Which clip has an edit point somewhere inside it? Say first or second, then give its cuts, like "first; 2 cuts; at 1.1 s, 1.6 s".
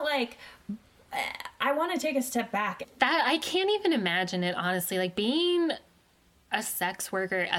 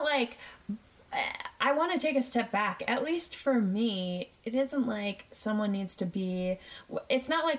first; 1 cut; at 2.8 s